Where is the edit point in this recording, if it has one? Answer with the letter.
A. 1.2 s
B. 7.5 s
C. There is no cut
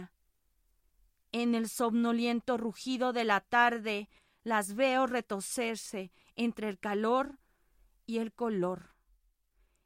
C